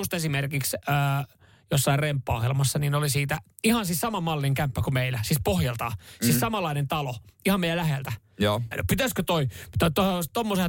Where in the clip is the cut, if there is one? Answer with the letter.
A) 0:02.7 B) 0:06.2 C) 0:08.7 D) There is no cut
C